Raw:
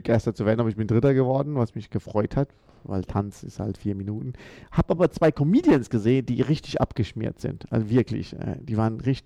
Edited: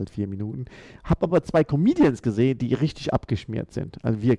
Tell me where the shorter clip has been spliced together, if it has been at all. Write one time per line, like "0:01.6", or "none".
none